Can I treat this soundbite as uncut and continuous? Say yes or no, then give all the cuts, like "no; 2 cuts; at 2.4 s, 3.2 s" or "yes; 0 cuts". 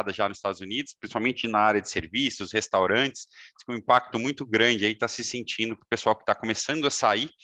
yes; 0 cuts